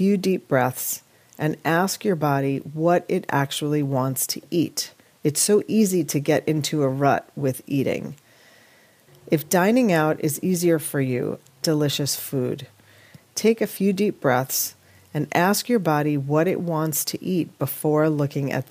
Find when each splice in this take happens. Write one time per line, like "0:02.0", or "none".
0:09.1
0:11.6